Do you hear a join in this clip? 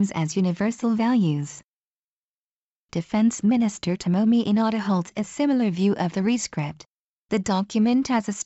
yes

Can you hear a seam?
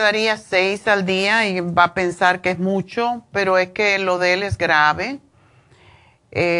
no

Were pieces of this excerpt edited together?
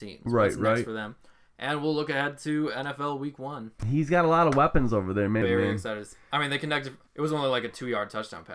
yes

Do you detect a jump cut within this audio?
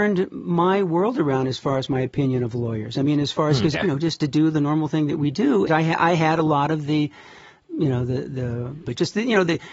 yes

